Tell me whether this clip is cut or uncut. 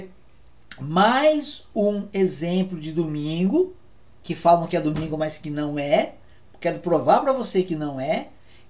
uncut